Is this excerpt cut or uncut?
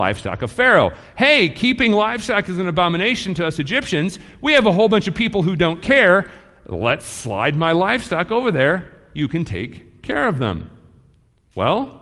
uncut